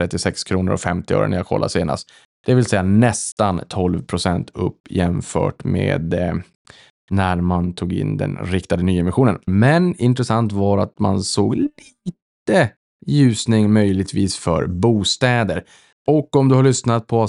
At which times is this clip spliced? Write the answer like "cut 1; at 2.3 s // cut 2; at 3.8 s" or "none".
cut 1; at 9.5 s